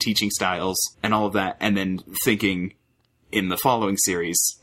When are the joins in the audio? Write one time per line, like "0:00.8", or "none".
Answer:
0:00.9